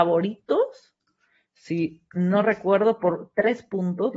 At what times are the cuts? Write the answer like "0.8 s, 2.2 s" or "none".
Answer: none